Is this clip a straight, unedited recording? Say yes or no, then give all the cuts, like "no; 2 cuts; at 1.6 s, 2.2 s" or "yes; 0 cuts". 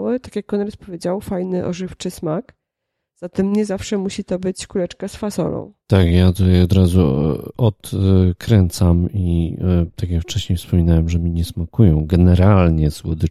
yes; 0 cuts